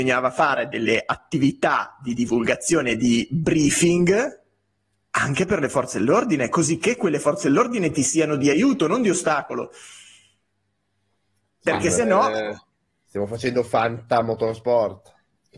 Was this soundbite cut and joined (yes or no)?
no